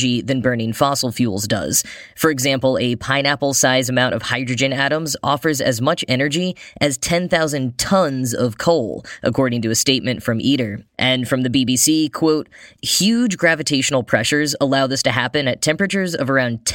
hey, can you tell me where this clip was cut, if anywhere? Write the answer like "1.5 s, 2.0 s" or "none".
10.9 s, 12.8 s